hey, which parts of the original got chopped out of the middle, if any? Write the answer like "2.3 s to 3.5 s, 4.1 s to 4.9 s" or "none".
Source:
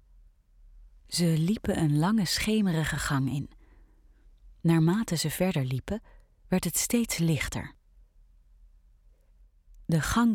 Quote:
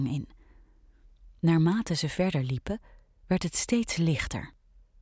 none